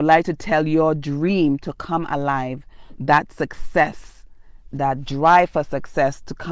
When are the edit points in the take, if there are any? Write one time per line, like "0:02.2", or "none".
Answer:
0:03.0
0:04.7